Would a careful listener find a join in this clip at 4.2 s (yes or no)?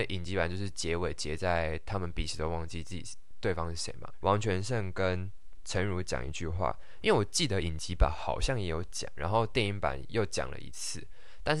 yes